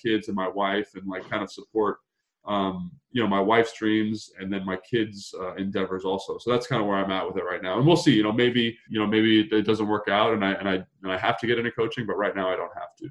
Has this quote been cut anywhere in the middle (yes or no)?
yes